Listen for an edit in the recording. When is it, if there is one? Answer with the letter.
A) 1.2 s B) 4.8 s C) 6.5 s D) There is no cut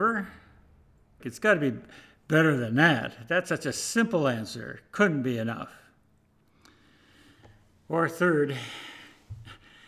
A